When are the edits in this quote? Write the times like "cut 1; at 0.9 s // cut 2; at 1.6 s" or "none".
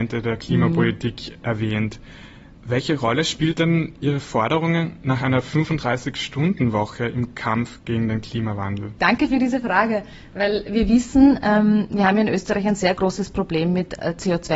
cut 1; at 9.0 s